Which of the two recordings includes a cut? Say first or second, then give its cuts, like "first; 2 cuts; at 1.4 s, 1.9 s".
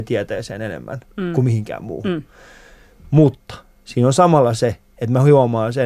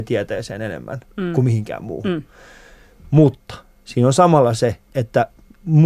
second; 1 cut; at 4.9 s